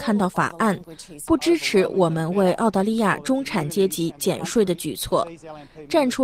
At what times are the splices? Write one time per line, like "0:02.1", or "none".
0:01.3